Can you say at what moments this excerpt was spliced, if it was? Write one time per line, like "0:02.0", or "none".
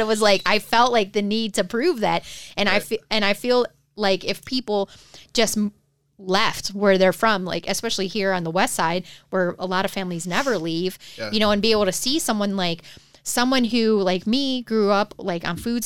none